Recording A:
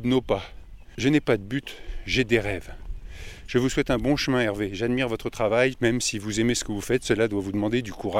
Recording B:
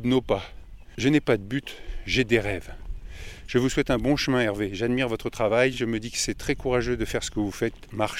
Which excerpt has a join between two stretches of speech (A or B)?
A